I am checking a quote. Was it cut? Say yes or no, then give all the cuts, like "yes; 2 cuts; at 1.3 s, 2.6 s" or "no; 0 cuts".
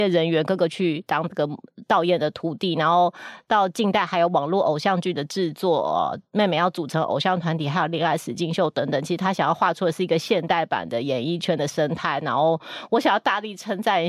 no; 0 cuts